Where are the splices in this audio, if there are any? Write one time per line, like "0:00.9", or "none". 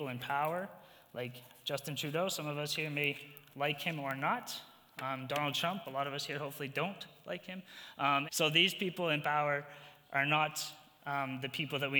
0:08.3